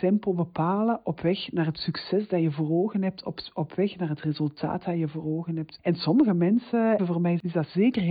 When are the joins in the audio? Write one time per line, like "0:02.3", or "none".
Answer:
0:05.8
0:07.0